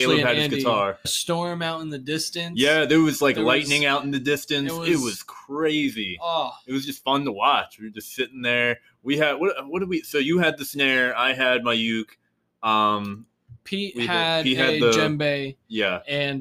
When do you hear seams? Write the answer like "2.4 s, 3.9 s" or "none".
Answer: 1.0 s